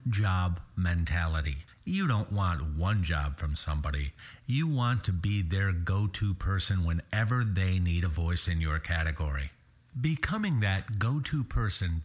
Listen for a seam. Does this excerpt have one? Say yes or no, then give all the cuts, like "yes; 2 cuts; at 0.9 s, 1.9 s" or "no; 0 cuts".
yes; 1 cut; at 1.7 s